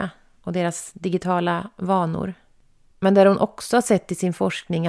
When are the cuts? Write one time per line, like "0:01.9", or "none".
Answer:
0:02.9